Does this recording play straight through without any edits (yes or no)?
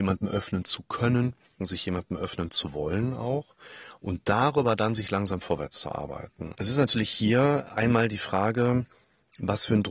no